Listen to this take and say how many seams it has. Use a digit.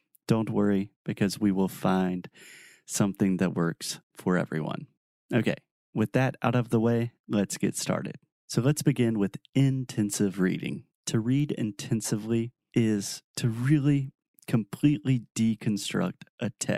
0